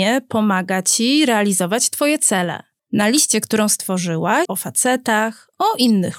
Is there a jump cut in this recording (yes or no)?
yes